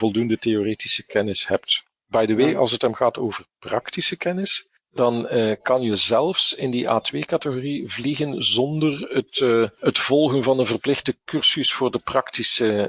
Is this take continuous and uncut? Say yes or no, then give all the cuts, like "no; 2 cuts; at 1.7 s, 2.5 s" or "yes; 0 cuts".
yes; 0 cuts